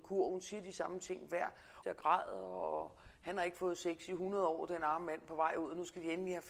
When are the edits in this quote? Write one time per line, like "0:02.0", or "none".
0:01.8

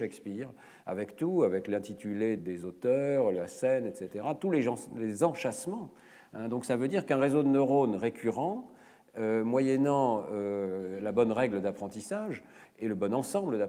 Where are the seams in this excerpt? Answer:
0:02.4

